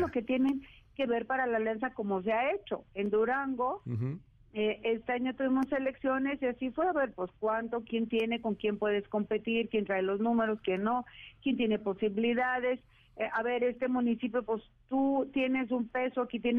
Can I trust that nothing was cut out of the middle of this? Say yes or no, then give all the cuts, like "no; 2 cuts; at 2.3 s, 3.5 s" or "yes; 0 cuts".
yes; 0 cuts